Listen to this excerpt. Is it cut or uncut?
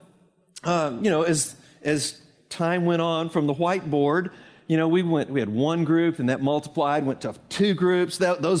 uncut